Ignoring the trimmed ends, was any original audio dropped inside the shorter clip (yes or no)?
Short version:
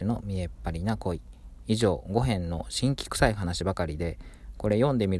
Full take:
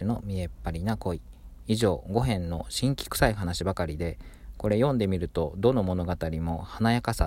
no